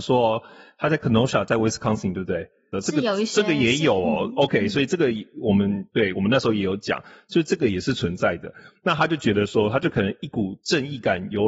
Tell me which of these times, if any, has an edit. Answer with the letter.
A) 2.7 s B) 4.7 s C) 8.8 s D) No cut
A